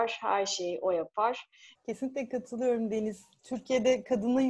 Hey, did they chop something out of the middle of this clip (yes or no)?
yes